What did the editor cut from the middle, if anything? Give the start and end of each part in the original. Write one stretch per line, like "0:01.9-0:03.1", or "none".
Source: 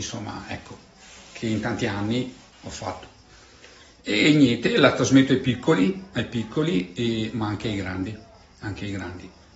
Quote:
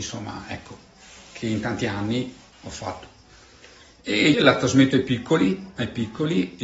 0:04.3-0:04.7

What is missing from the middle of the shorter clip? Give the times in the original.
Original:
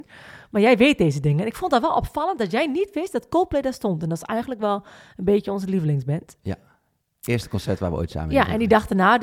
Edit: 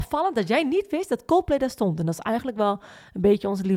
none

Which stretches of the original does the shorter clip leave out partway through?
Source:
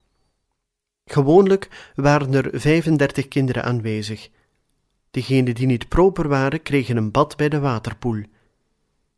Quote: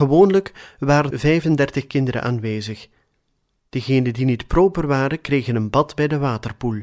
0:02.3-0:02.5

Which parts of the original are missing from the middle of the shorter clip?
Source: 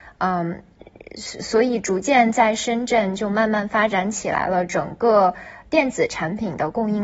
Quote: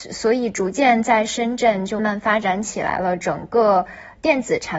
0:03.3-0:03.5

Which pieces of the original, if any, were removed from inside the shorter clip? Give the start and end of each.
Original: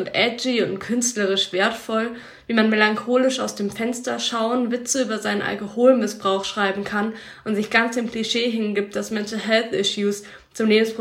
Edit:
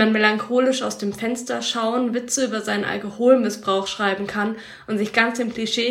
none

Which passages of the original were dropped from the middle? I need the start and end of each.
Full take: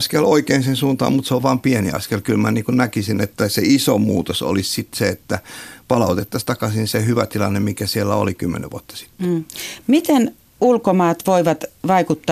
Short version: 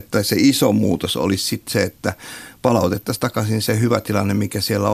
none

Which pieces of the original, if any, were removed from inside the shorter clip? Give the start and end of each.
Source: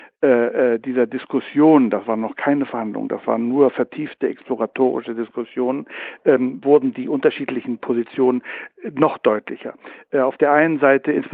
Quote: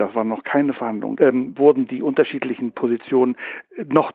0:03.1-0:06.2

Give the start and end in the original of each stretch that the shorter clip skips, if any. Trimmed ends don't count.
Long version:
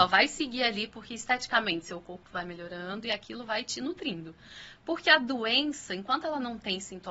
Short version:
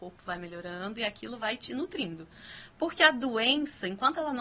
none

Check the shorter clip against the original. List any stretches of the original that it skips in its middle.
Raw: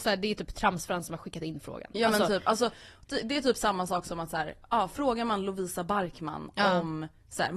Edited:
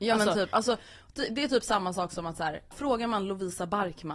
0:04.6-0:04.9

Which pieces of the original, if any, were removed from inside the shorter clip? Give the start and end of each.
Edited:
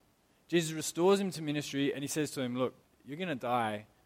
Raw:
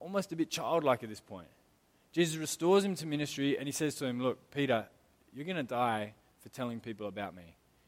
0:04.5-0:05.1

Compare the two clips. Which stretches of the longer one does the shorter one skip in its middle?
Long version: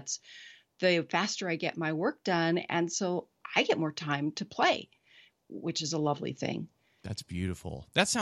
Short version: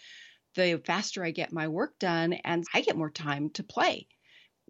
0:02.9-0:03.5

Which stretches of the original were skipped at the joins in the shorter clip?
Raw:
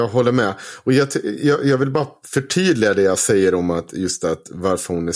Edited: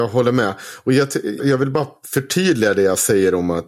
0:01.4-0:01.6

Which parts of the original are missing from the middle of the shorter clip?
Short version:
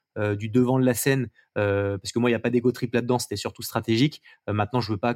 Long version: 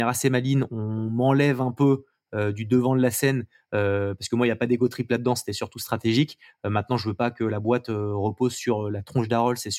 none

